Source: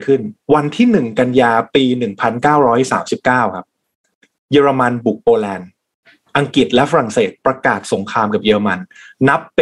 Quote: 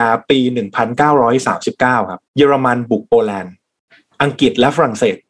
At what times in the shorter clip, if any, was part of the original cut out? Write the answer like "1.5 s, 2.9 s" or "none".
2.3 s